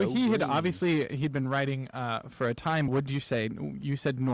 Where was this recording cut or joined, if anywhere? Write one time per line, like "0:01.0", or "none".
0:02.9